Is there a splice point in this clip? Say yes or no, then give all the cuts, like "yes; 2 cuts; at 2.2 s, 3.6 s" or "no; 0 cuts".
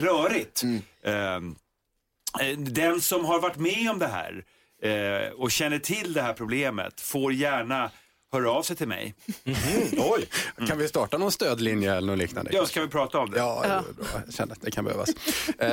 no; 0 cuts